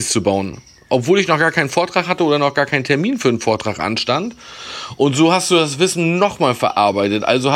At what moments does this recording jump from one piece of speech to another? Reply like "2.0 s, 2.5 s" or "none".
none